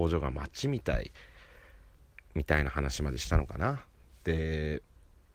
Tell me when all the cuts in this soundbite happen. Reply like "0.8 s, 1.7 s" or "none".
2.3 s